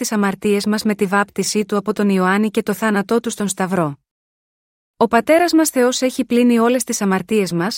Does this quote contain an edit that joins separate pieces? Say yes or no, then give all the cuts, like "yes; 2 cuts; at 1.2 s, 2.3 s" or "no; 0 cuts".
yes; 1 cut; at 4.8 s